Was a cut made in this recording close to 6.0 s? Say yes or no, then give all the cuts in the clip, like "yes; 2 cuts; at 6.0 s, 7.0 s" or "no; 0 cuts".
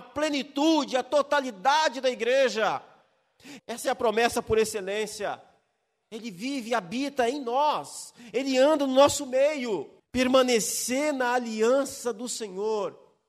yes; 3 cuts; at 3.6 s, 6.0 s, 10.0 s